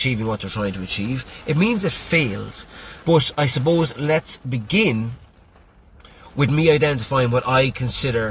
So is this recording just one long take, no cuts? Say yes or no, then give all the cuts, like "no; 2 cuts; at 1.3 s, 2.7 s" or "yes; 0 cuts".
no; 1 cut; at 3.0 s